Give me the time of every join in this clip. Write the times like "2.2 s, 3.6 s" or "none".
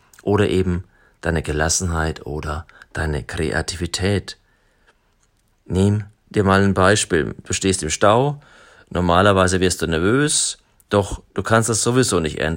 none